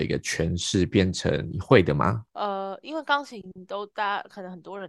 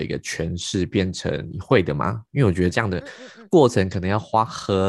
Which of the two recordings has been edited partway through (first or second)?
first